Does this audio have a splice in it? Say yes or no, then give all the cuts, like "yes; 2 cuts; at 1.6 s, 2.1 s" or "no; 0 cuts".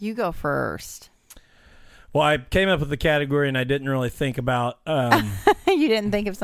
no; 0 cuts